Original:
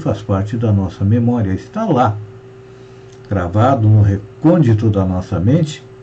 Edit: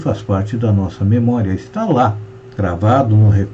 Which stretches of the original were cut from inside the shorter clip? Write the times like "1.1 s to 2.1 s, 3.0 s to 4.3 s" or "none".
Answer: 2.5 s to 3.2 s